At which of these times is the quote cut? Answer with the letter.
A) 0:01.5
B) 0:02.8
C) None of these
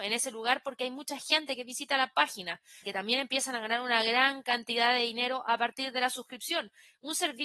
B